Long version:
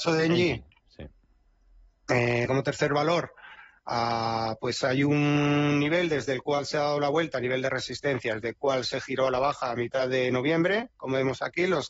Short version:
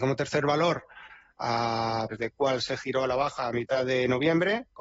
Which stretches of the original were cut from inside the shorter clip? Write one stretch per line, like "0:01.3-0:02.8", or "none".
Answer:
0:04.6-0:08.3